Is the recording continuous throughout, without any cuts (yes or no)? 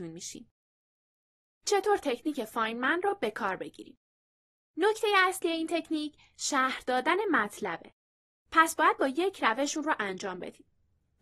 yes